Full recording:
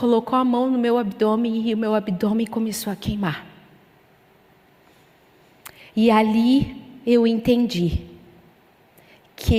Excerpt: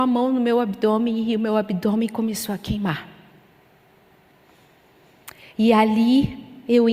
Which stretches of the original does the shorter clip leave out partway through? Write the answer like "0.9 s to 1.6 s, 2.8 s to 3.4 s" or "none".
none